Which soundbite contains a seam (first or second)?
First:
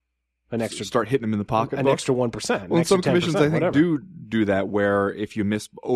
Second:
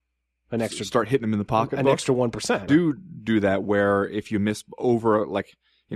second